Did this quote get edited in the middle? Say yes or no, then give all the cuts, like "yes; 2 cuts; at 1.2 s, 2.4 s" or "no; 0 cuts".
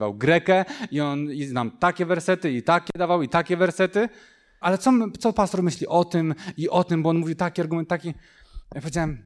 yes; 1 cut; at 4.6 s